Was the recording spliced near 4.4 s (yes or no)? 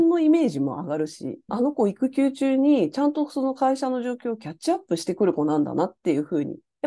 no